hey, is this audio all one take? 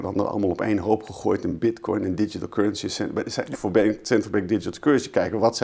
no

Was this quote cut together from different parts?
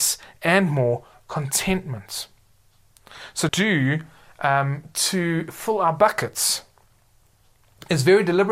yes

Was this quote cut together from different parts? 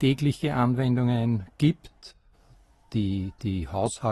no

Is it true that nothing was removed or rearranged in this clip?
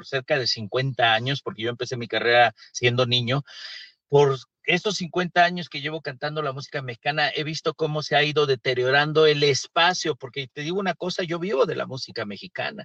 yes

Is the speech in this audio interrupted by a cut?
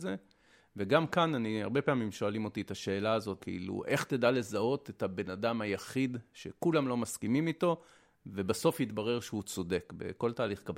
yes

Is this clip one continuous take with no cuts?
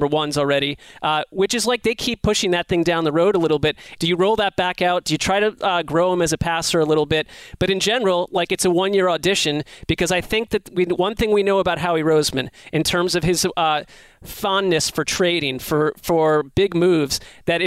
no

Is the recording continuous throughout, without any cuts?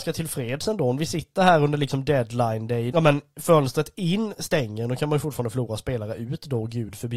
no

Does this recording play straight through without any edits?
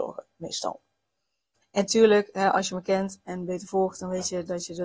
no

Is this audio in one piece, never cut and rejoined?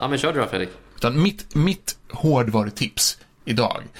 no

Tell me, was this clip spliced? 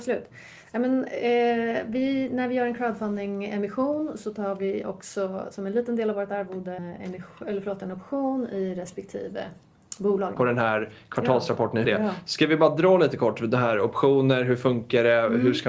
yes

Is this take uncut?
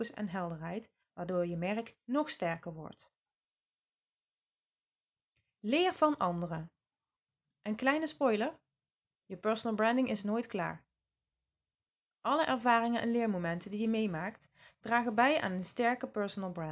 yes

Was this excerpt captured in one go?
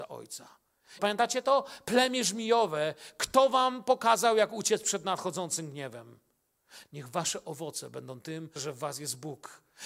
no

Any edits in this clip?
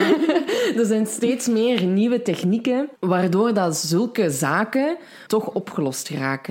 yes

